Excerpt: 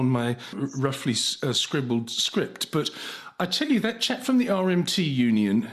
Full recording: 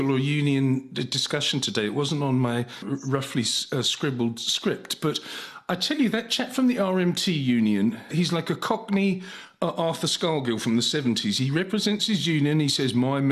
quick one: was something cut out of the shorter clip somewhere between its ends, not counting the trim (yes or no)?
no